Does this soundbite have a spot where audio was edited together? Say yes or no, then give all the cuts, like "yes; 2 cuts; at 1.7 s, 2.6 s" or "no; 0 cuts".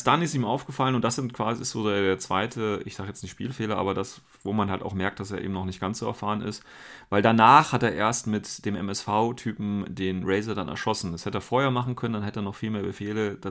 no; 0 cuts